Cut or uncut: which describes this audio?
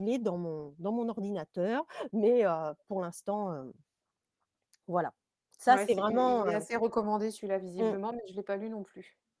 uncut